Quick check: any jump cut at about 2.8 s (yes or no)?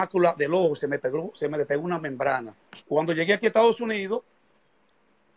yes